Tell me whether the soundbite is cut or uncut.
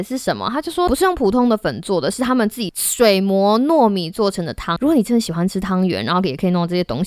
cut